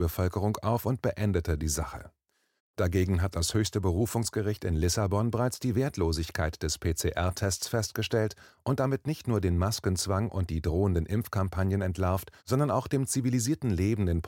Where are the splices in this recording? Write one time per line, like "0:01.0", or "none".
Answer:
0:02.6
0:12.4